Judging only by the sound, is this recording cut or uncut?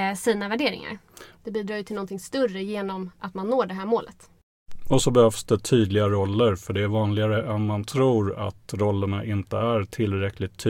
cut